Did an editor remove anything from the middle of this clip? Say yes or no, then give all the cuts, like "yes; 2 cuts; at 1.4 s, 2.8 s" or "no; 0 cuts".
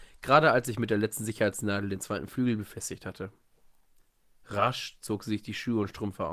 no; 0 cuts